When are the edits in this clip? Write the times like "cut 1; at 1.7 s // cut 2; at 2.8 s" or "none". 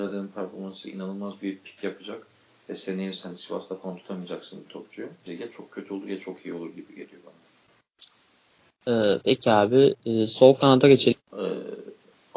cut 1; at 5.3 s // cut 2; at 11.1 s